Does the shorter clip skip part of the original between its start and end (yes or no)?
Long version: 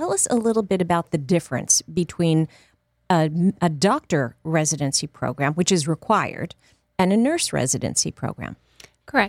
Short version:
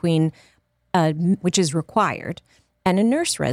yes